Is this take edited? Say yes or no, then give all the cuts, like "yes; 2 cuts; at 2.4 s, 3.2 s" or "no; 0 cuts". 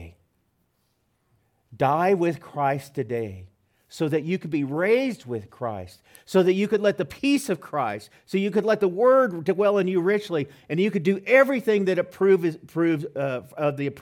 no; 0 cuts